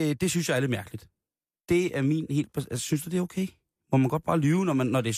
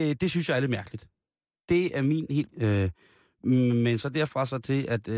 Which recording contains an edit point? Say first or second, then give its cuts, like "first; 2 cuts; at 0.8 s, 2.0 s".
second; 1 cut; at 2.5 s